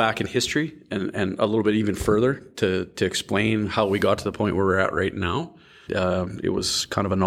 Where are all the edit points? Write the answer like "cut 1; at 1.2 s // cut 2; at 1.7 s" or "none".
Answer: cut 1; at 5.9 s

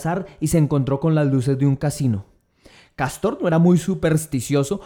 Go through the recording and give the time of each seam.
none

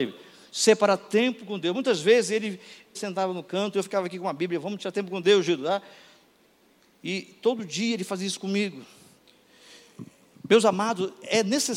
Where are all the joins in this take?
cut 1; at 2.9 s

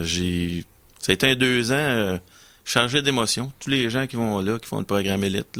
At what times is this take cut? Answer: none

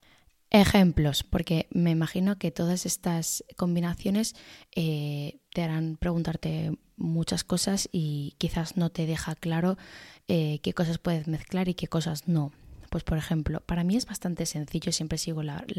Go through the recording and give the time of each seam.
cut 1; at 5.5 s

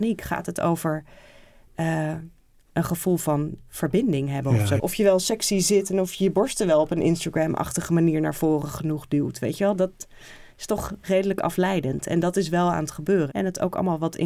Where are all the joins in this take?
cut 1; at 4.8 s // cut 2; at 13.3 s

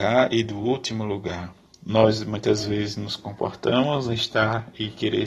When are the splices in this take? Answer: none

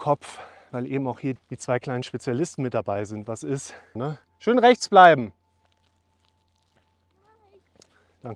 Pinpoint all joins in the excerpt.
cut 1; at 1.4 s // cut 2; at 4.0 s

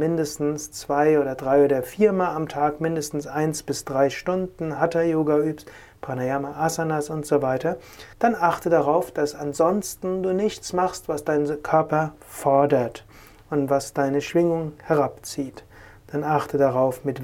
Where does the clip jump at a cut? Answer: cut 1; at 8.1 s

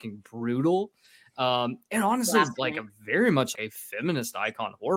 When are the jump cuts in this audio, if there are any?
cut 1; at 3.5 s

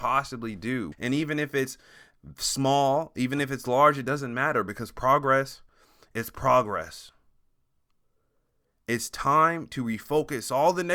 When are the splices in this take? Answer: cut 1; at 0.9 s

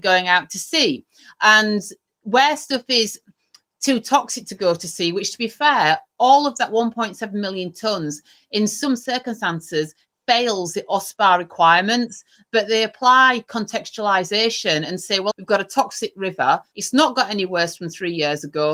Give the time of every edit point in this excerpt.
cut 1; at 15.3 s // cut 2; at 16.7 s

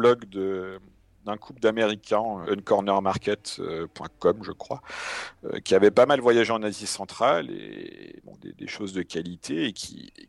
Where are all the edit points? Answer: cut 1; at 2.4 s // cut 2; at 8.4 s

